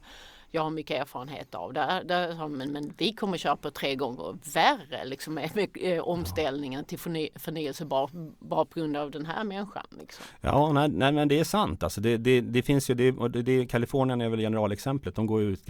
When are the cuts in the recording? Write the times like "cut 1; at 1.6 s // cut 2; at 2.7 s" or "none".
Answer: none